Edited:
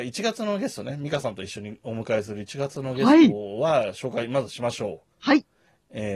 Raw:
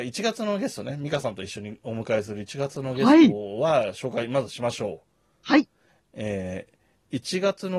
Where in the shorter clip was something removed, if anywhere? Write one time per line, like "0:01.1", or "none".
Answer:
0:05.1